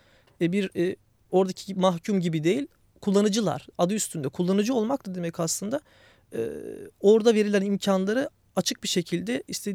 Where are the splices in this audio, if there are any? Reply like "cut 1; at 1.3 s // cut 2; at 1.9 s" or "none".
none